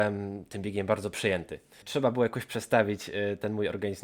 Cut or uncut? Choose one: cut